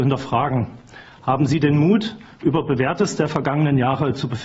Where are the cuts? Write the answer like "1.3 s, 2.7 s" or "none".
none